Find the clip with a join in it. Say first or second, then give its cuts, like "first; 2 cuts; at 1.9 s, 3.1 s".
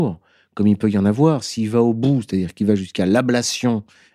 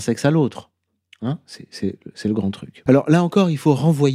second; 1 cut; at 2.9 s